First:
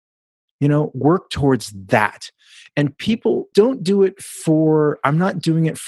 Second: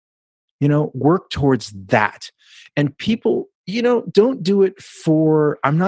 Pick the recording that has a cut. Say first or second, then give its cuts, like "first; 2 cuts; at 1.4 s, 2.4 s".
first; 1 cut; at 3.5 s